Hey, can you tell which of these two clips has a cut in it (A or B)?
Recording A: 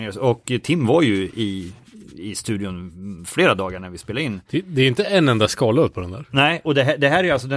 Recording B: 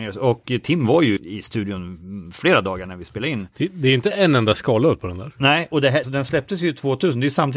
B